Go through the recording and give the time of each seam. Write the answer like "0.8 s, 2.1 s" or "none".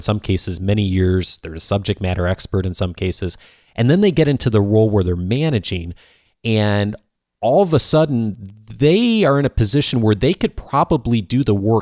none